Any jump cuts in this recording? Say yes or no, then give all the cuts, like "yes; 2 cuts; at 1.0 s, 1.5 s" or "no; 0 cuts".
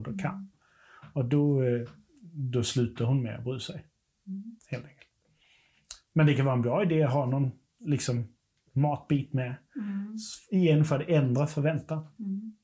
no; 0 cuts